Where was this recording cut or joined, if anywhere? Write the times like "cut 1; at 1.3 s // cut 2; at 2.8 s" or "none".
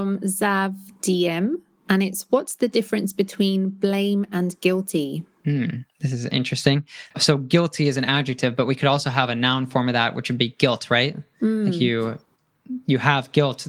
cut 1; at 7.1 s